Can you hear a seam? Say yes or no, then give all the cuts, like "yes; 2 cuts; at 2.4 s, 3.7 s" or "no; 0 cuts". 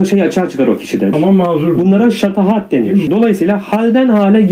yes; 2 cuts; at 1.1 s, 3.1 s